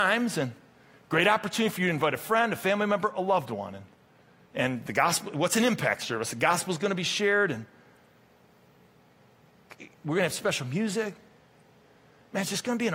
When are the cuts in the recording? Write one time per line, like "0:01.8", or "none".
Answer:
none